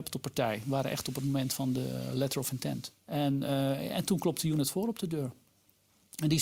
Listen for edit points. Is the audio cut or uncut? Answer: cut